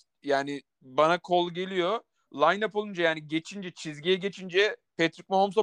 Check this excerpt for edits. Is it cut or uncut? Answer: cut